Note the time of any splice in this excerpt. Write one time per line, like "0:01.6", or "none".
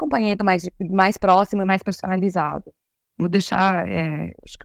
none